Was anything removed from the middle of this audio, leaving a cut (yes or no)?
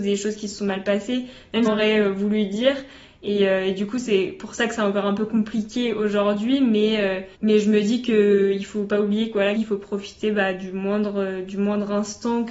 yes